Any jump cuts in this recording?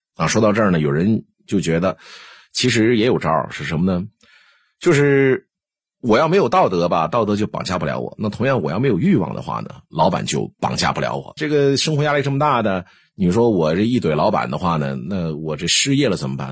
yes; 1 cut; at 11.4 s

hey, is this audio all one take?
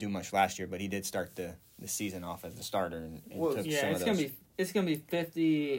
yes; 0 cuts

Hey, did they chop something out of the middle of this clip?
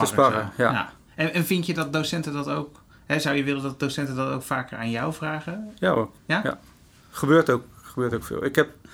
no; 0 cuts

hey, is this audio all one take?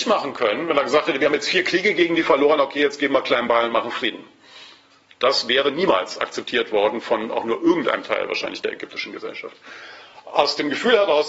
yes; 0 cuts

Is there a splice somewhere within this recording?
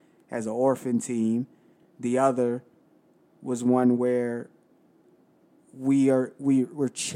no; 0 cuts

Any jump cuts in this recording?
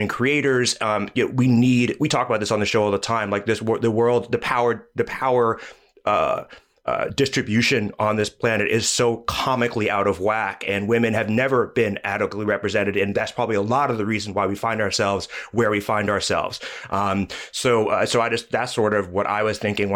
no; 0 cuts

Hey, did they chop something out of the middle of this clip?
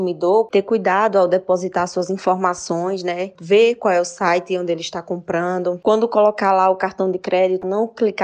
no; 0 cuts

